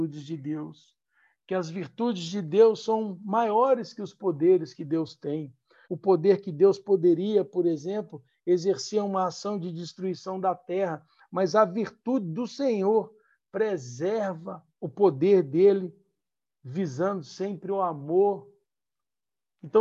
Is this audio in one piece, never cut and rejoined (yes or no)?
no